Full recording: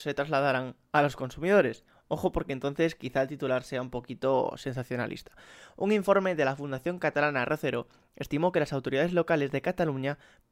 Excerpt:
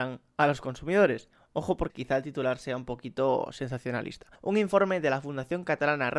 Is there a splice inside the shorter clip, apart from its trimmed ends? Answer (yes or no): yes